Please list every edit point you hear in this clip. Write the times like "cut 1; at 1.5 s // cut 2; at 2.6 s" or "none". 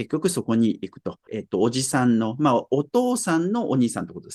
cut 1; at 1.3 s